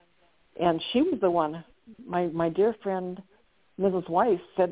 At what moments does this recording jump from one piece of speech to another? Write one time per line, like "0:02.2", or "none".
none